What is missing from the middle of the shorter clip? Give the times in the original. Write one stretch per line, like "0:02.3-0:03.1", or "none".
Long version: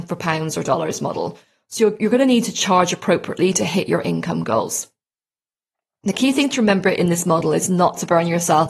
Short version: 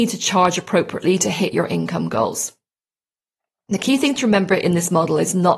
none